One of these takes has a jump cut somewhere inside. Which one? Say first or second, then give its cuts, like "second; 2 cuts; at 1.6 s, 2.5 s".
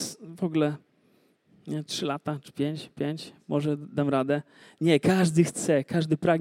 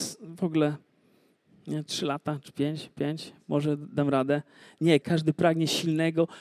second; 1 cut; at 5.0 s